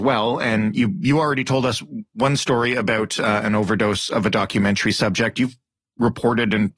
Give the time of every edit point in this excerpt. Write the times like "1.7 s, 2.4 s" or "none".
none